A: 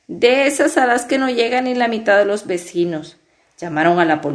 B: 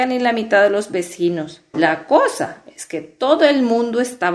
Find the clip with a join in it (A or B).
B